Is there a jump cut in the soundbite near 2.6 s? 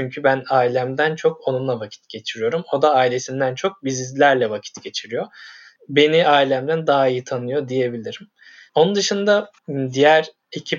no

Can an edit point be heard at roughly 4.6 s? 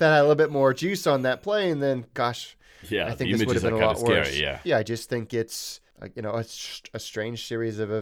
yes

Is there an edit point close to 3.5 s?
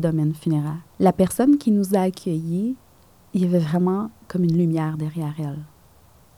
no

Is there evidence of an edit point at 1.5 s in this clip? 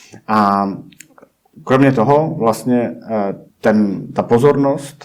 no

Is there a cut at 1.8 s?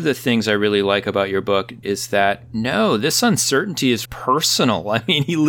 yes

